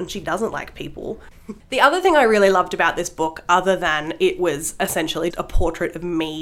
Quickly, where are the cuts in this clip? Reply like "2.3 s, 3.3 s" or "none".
1.3 s, 5.3 s